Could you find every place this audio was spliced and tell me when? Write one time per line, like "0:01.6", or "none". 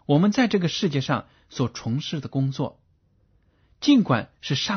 none